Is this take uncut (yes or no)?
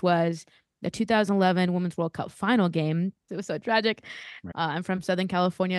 no